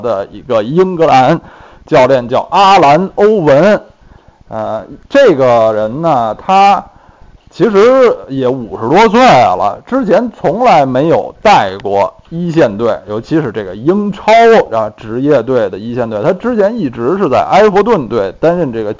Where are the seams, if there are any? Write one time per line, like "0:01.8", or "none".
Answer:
none